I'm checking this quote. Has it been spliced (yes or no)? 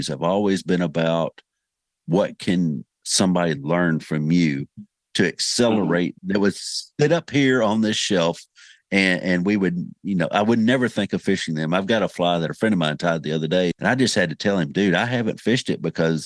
yes